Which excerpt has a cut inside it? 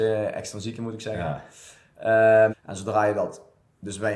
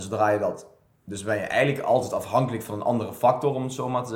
first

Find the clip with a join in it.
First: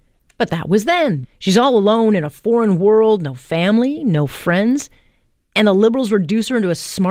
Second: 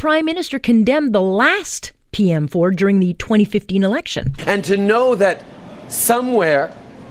first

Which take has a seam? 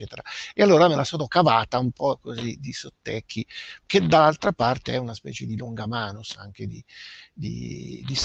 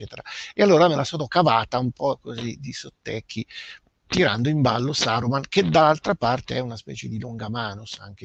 first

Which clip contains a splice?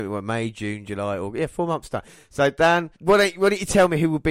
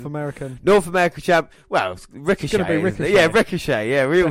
first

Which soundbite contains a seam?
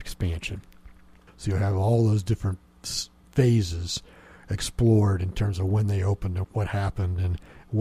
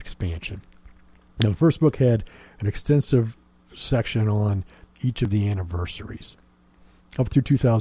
first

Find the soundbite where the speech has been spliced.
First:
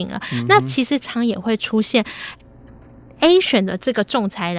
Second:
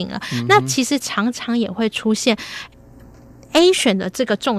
first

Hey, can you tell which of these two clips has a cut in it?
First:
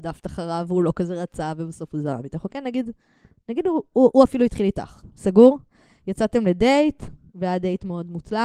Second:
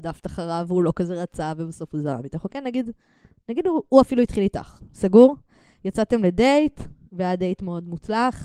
second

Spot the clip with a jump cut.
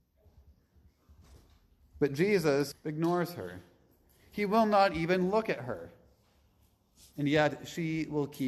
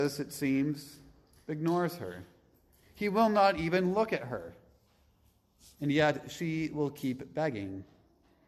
first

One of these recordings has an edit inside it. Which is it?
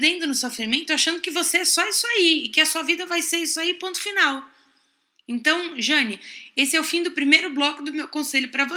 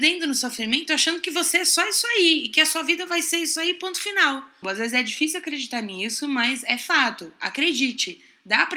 second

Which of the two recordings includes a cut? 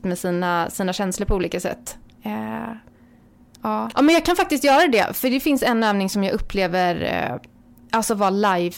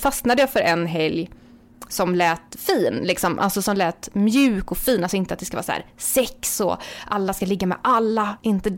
first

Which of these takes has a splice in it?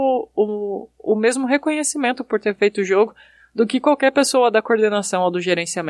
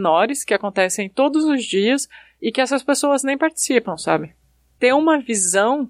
second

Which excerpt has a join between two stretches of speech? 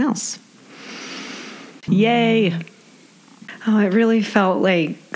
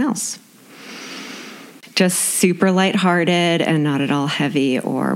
first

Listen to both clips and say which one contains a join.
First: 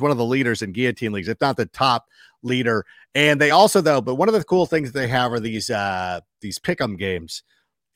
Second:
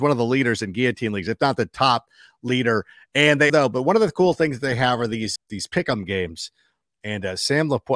second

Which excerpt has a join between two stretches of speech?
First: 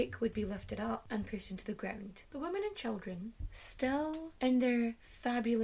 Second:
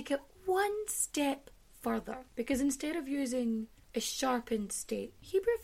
first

